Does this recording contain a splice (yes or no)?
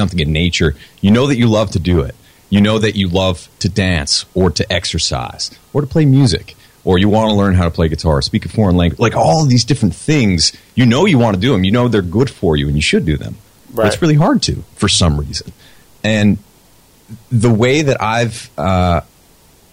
no